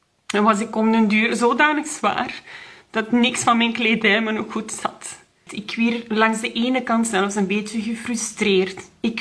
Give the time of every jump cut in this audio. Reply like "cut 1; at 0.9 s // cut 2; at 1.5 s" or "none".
cut 1; at 5.5 s

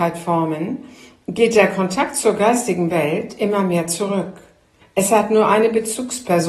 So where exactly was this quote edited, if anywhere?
cut 1; at 4.8 s

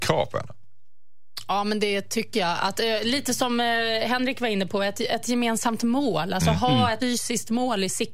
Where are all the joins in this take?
cut 1; at 7.0 s

